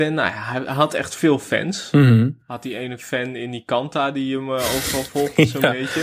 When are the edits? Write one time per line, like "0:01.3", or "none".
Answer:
none

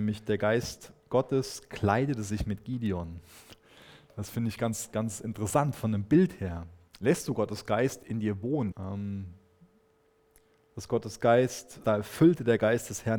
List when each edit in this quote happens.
0:06.9
0:08.7
0:11.8

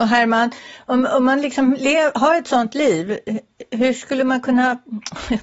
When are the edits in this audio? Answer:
none

